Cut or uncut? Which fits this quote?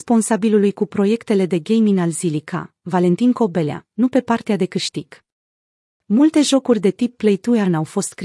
cut